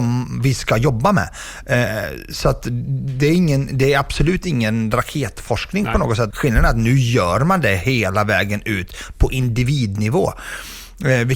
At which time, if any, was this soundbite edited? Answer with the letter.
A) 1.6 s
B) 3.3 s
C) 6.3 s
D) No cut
C